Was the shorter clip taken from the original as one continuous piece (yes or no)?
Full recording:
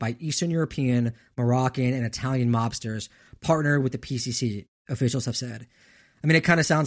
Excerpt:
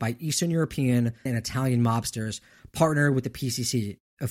no